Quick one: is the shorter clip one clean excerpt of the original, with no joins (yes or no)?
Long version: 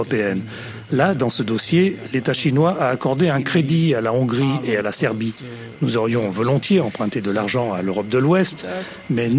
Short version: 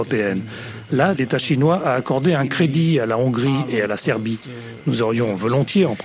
no